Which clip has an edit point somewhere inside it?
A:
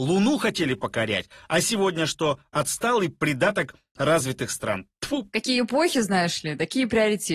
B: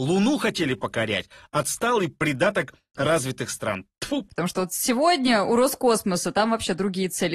B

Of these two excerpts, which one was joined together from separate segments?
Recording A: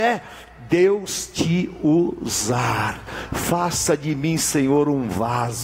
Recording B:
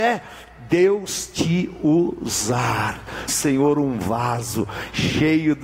B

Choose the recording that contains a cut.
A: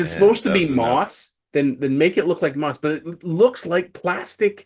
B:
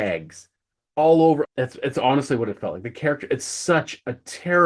B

